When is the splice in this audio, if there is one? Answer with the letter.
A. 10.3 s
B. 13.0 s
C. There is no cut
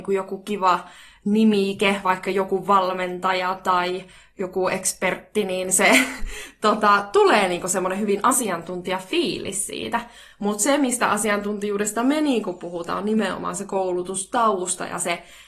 C